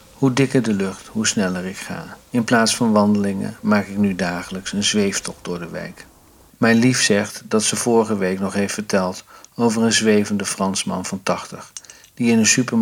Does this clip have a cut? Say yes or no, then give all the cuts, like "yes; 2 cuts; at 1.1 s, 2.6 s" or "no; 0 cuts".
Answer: yes; 2 cuts; at 2.2 s, 6.5 s